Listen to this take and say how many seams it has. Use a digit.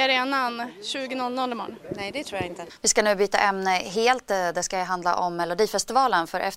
1